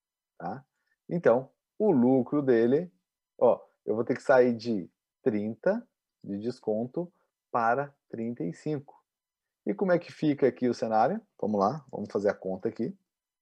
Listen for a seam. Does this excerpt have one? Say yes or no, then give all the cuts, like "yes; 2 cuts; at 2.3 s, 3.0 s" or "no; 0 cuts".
no; 0 cuts